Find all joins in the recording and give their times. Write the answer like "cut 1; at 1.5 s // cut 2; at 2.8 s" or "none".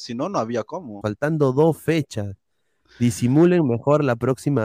cut 1; at 1.0 s